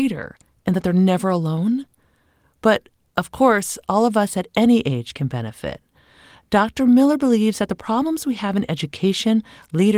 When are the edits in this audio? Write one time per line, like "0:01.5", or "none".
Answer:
none

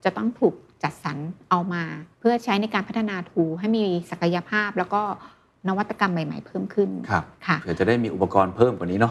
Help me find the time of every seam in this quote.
0:02.1

